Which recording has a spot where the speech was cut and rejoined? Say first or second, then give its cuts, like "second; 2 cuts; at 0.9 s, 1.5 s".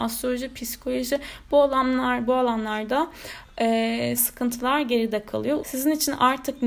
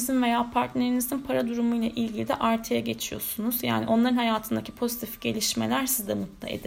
first; 2 cuts; at 4.2 s, 5.6 s